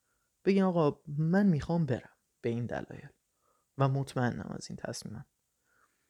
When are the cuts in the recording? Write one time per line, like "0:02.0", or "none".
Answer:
none